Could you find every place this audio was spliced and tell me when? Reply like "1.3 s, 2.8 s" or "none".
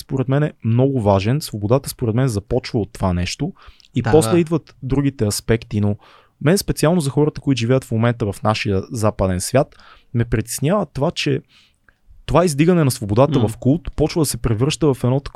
none

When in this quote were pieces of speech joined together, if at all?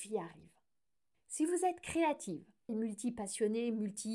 1.1 s, 2.7 s

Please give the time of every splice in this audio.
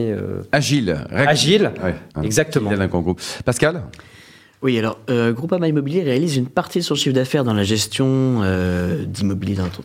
2.1 s

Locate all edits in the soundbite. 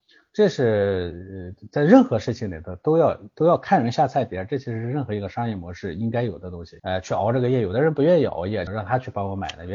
6.8 s, 8.7 s

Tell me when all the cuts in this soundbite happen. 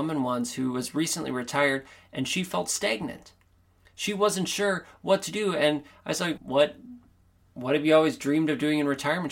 6.4 s

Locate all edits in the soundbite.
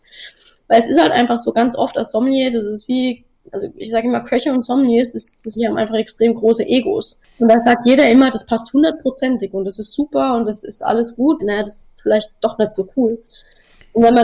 5.6 s, 11.4 s

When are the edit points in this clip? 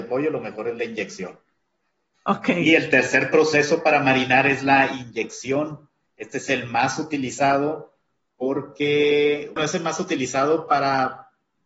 2.1 s, 9.6 s

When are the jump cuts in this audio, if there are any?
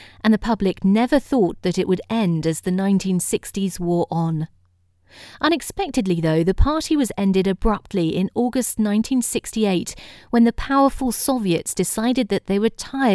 none

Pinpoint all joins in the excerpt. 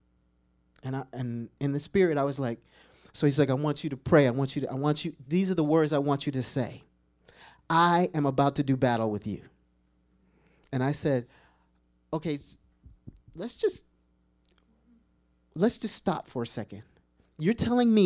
none

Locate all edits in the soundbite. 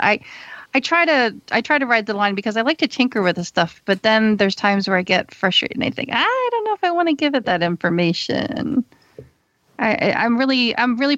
none

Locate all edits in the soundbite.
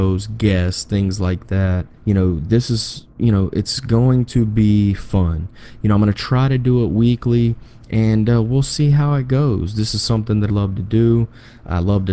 1.9 s, 10.5 s

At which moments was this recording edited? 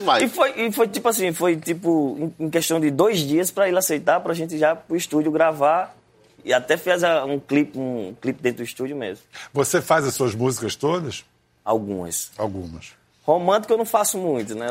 none

